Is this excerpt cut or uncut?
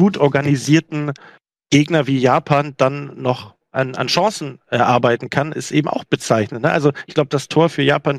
uncut